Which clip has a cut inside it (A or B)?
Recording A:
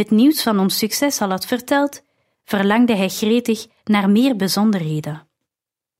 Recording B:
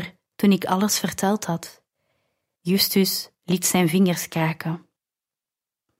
B